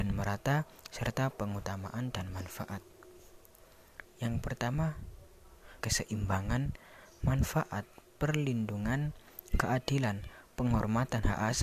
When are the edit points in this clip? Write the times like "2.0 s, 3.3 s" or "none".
4.0 s, 5.8 s